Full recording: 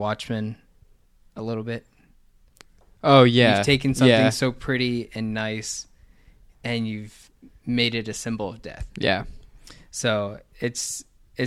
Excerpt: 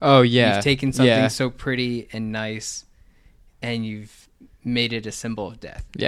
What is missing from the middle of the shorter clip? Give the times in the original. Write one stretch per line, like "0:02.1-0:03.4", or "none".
none